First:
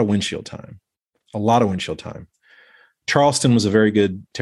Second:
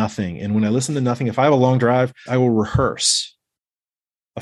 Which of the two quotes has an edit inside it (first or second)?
second